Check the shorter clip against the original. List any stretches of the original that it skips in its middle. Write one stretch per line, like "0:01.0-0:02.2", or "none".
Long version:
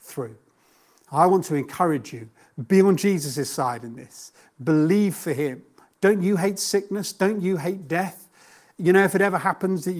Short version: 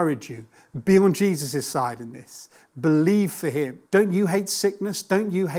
0:05.7-0:06.0